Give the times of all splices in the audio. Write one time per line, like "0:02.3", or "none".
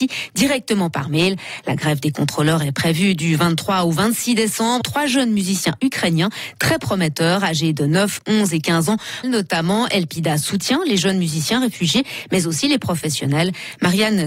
0:04.8
0:09.2